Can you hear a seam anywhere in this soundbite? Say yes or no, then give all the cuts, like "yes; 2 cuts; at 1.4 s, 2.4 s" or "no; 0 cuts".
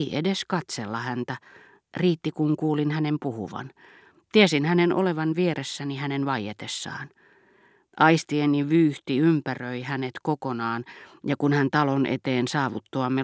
no; 0 cuts